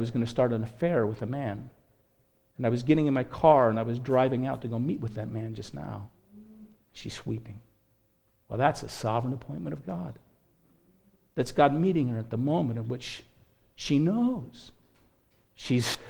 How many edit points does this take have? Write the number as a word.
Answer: one